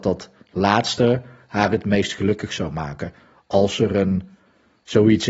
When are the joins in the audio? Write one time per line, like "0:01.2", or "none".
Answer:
none